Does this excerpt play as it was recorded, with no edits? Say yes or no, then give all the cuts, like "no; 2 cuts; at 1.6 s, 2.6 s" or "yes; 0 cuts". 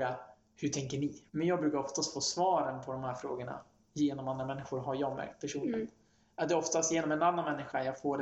no; 1 cut; at 1.3 s